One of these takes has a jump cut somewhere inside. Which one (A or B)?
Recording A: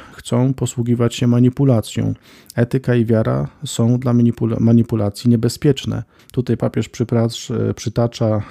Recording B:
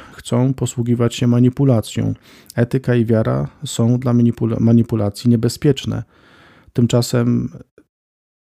A